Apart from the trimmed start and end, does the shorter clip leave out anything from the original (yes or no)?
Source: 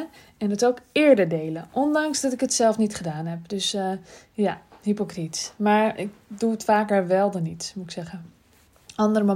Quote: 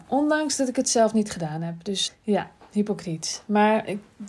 yes